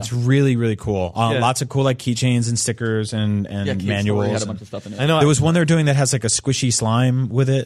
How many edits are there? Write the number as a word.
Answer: zero